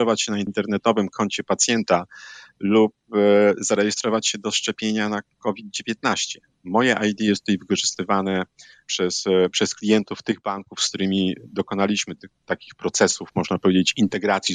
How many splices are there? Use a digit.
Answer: 1